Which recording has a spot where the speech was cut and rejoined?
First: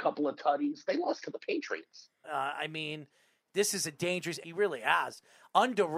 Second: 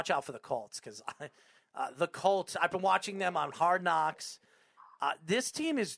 first; 2 cuts; at 2.2 s, 4.4 s

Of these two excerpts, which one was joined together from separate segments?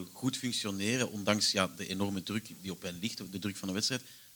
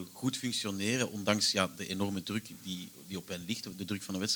first; 1 cut; at 2.5 s

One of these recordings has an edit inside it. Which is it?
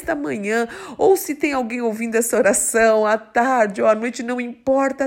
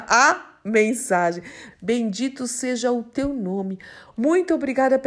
second; 2 cuts; at 1.7 s, 4.1 s

